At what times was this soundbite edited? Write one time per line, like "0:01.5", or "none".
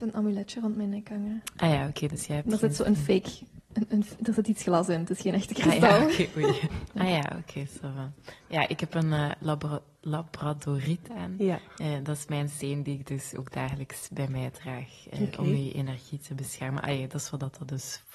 0:06.9